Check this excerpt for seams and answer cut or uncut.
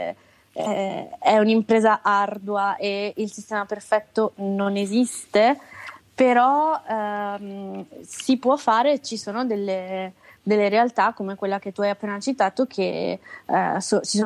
uncut